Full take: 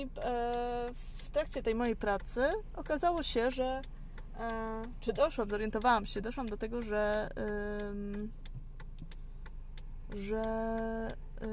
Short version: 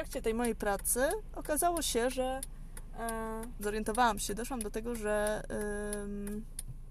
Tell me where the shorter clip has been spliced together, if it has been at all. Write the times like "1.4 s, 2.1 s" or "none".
3.6 s